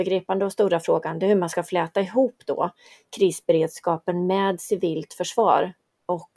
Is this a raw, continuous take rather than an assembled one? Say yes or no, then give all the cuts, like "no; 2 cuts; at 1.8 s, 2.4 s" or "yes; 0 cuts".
yes; 0 cuts